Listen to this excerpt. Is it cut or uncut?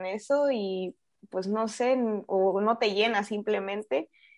uncut